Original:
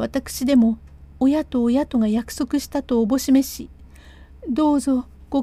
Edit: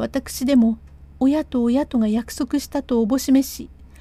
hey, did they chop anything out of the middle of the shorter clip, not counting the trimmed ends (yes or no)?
no